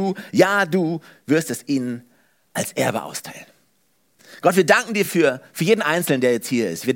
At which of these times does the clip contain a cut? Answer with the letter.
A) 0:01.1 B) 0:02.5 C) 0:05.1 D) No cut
D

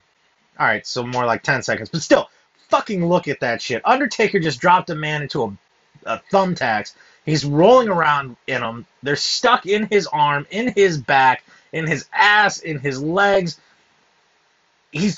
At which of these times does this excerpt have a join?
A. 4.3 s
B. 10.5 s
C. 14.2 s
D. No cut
D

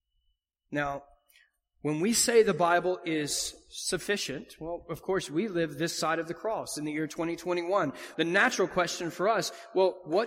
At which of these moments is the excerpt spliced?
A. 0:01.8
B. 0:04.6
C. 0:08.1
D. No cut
C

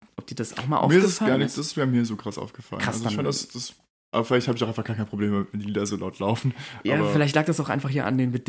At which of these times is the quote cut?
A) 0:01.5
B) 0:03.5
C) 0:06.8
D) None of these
D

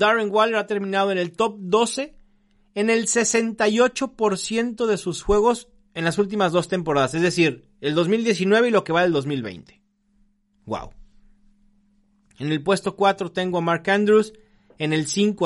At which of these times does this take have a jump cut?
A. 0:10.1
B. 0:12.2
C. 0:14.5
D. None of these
D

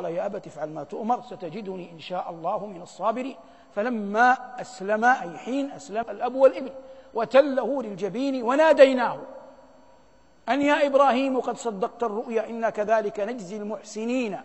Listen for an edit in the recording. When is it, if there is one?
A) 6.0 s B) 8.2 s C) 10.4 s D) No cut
A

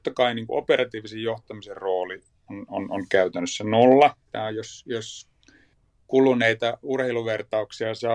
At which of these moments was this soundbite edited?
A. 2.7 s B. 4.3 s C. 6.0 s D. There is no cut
B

